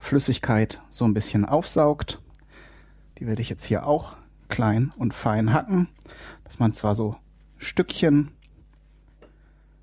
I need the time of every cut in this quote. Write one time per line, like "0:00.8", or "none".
0:03.1